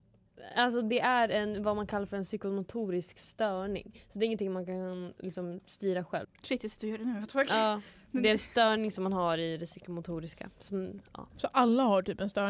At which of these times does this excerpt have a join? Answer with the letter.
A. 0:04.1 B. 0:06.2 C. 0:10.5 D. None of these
B